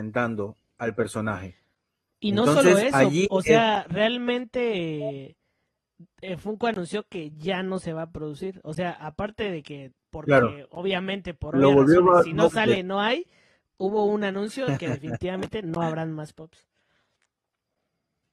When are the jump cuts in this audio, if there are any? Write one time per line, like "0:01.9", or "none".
none